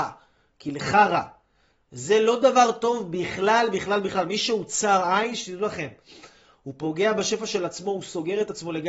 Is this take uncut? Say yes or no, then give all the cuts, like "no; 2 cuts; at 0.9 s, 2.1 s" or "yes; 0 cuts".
yes; 0 cuts